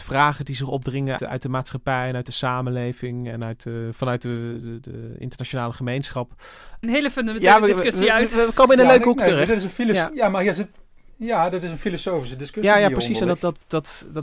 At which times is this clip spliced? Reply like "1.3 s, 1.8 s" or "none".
1.2 s, 6.8 s